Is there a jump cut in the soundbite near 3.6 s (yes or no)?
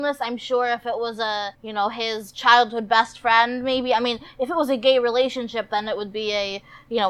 no